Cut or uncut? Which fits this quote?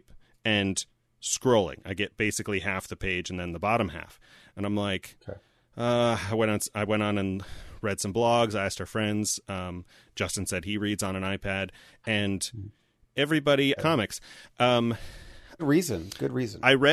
cut